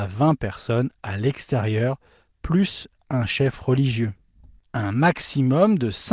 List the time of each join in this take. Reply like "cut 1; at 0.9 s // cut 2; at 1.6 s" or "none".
none